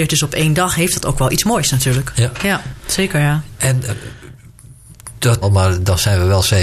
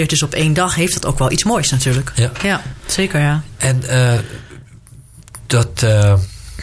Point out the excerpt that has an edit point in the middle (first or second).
first